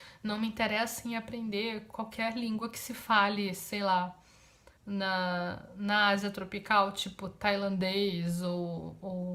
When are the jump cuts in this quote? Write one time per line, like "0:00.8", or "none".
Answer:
0:04.8

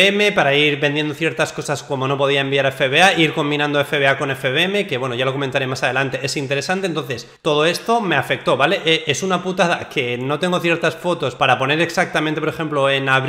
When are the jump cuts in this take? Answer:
0:11.4

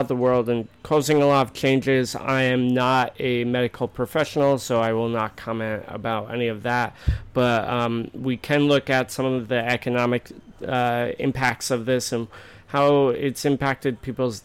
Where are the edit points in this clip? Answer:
none

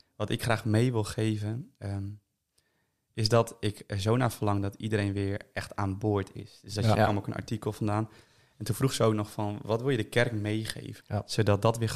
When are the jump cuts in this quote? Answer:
0:07.0
0:11.0

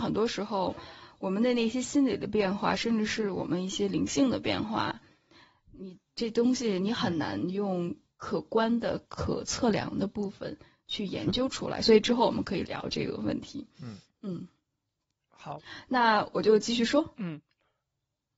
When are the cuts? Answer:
0:09.1

